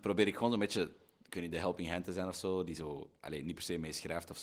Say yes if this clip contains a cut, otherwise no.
no